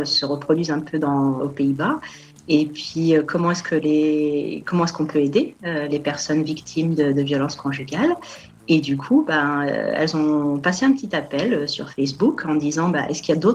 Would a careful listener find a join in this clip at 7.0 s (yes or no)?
no